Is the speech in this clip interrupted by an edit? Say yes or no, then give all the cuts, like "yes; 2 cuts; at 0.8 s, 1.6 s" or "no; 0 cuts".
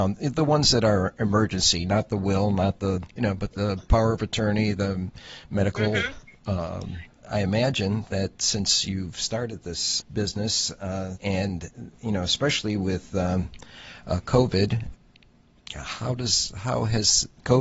yes; 3 cuts; at 7.1 s, 10.0 s, 11.2 s